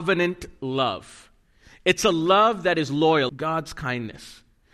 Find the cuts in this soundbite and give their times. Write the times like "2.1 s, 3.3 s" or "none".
3.3 s